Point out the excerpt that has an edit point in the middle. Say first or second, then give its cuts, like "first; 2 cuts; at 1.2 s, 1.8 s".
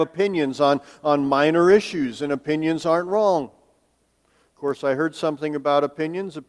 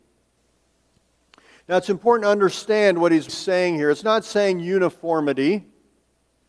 second; 1 cut; at 3.3 s